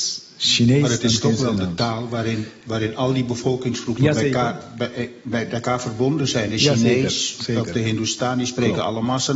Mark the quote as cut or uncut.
uncut